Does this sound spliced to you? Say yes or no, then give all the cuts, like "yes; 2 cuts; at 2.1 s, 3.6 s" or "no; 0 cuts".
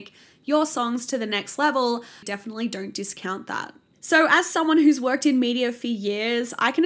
yes; 2 cuts; at 2.2 s, 3.9 s